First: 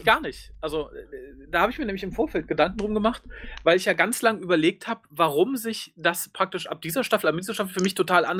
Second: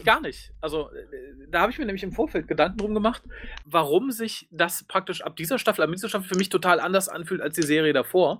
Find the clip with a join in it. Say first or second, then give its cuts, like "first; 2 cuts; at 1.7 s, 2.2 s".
second; 1 cut; at 3.6 s